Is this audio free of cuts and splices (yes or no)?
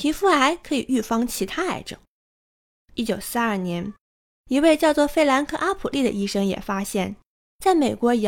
yes